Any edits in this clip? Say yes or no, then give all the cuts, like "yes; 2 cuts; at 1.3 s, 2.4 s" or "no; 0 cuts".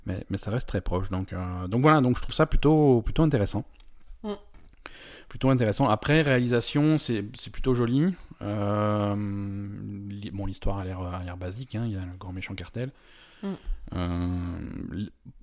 no; 0 cuts